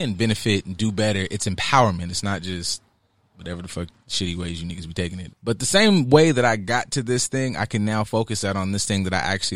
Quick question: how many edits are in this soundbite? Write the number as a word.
one